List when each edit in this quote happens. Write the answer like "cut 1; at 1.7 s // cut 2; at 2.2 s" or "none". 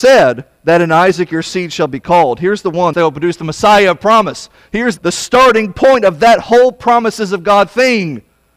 cut 1; at 2.9 s // cut 2; at 5.0 s

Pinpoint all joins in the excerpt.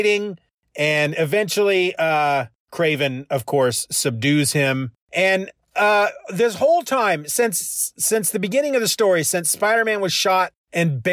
none

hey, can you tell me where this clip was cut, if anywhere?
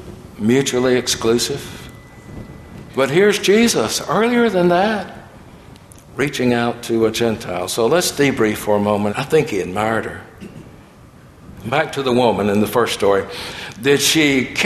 cut 1; at 2.9 s // cut 2; at 9.1 s // cut 3; at 11.6 s

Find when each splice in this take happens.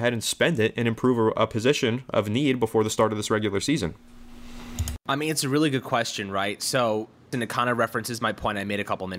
cut 1; at 7.3 s

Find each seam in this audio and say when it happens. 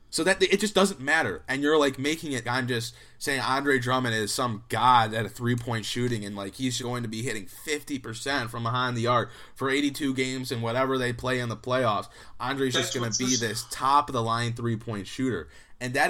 cut 1; at 2.4 s // cut 2; at 6.8 s

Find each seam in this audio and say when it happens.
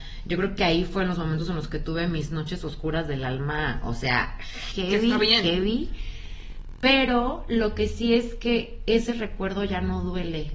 cut 1; at 4.7 s

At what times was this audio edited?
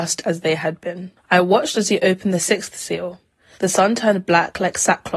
cut 1; at 3.5 s

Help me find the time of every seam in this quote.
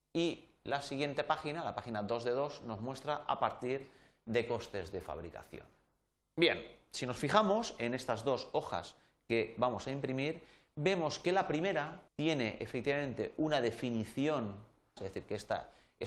cut 1; at 6.2 s // cut 2; at 12.1 s // cut 3; at 15.0 s

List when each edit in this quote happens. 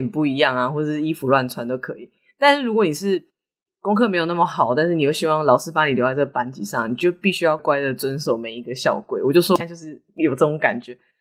cut 1; at 7.6 s

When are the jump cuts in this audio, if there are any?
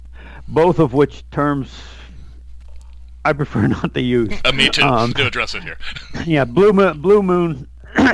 cut 1; at 5.2 s

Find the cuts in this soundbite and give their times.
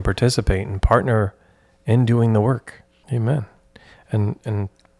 cut 1; at 3.0 s

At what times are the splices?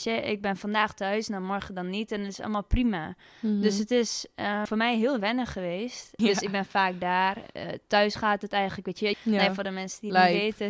cut 1; at 4.7 s // cut 2; at 6.2 s // cut 3; at 9.1 s

